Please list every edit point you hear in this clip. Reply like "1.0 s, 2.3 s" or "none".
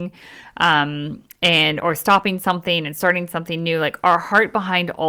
1.8 s